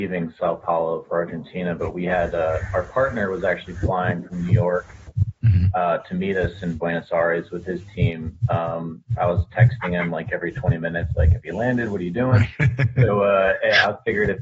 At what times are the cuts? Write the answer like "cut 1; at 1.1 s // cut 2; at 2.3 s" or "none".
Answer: cut 1; at 9.2 s